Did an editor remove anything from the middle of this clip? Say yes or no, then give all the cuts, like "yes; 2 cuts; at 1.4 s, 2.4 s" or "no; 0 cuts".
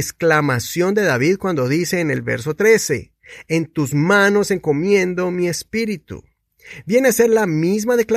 no; 0 cuts